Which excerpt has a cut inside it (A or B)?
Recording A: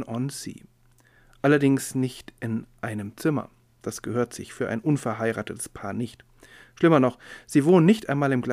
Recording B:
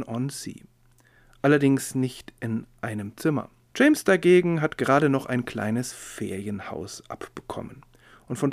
B